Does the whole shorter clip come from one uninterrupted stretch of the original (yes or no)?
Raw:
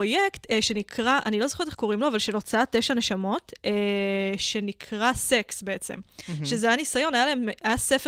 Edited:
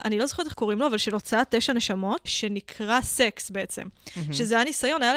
no